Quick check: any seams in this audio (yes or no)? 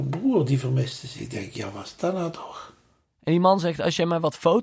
no